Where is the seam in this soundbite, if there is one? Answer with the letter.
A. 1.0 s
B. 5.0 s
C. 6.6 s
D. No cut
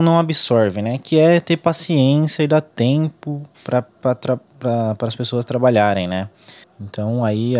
C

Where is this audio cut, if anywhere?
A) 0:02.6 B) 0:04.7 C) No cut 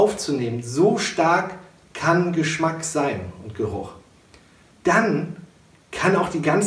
B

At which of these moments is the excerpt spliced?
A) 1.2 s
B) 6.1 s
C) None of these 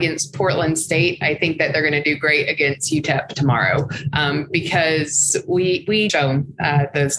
B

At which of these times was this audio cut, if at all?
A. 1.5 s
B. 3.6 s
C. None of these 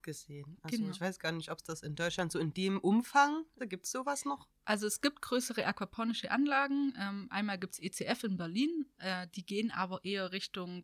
B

